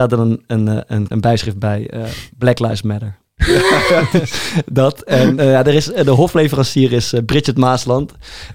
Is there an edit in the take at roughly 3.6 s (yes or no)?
no